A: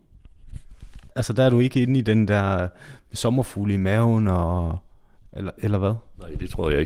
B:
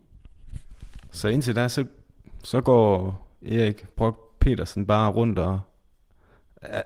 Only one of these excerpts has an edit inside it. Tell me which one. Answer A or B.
A